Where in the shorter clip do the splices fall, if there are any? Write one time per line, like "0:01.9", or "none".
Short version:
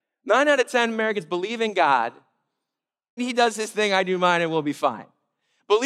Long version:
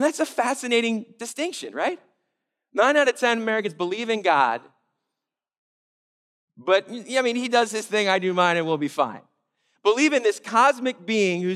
0:03.2